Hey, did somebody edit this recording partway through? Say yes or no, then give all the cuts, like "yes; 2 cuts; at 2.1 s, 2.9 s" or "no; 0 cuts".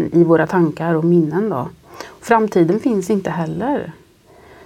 no; 0 cuts